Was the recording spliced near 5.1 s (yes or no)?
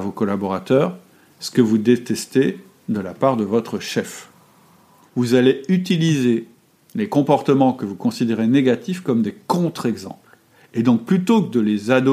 yes